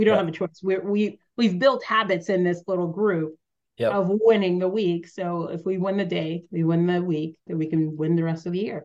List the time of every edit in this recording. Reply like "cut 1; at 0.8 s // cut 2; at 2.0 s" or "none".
cut 1; at 7.5 s

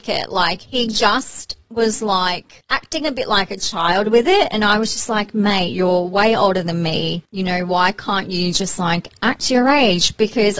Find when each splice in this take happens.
none

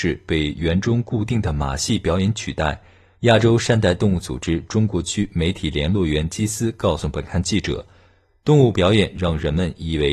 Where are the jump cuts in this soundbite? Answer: cut 1; at 3.1 s

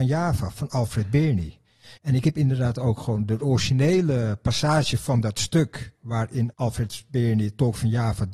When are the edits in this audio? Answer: cut 1; at 2.0 s // cut 2; at 6.5 s

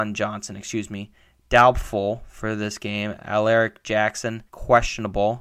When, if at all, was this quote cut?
cut 1; at 4.5 s

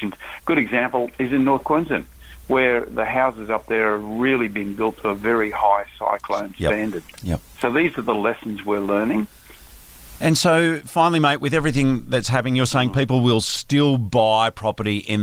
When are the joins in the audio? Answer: none

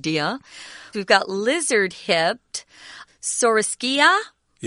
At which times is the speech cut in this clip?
cut 1; at 0.9 s // cut 2; at 3.1 s

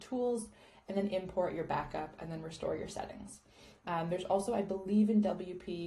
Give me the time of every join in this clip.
none

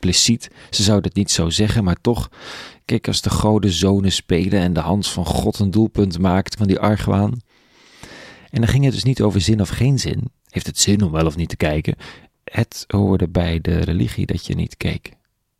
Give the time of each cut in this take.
cut 1; at 6.6 s

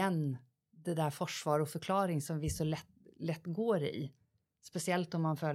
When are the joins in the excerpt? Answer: none

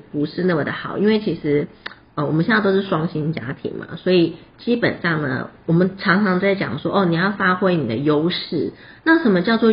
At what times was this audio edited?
none

